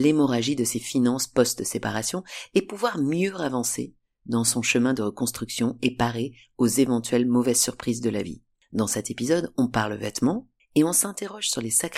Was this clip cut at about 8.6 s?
no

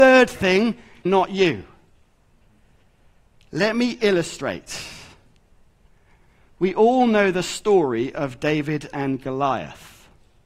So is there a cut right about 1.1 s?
yes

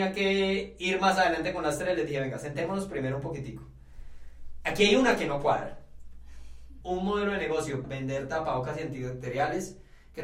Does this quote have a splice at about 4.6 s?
no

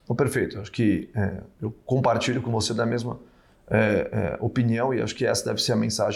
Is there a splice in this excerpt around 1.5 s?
yes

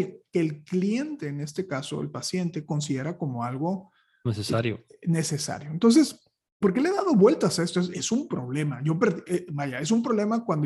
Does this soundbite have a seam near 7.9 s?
yes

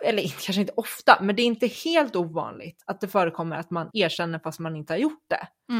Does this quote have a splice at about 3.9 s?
yes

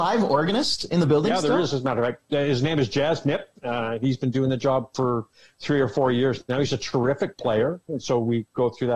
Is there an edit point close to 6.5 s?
no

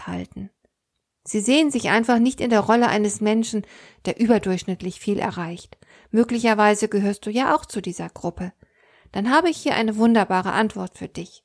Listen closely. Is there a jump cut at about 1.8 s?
no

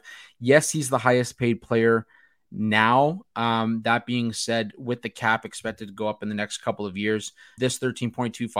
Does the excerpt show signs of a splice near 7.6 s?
yes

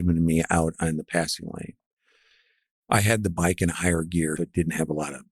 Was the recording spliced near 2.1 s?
no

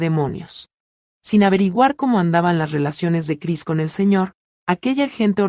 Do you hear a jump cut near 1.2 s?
yes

